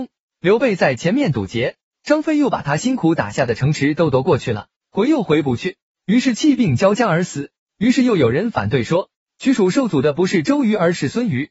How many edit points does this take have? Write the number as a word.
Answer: one